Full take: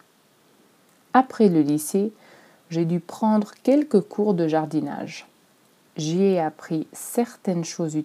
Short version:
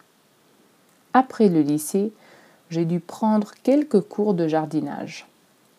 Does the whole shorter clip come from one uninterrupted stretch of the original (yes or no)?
yes